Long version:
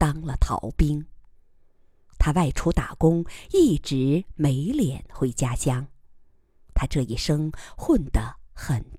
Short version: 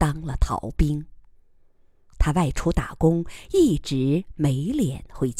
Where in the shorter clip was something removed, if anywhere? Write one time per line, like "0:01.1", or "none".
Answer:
none